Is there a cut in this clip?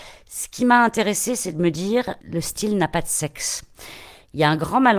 yes; 1 cut; at 2.2 s

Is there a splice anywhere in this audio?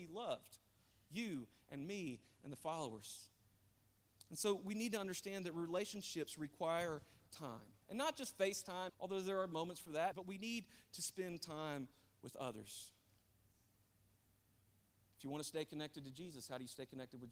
yes; 3 cuts; at 7.8 s, 8.9 s, 10.1 s

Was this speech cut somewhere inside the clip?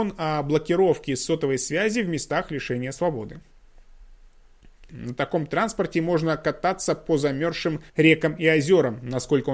yes; 2 cuts; at 4.9 s, 7.9 s

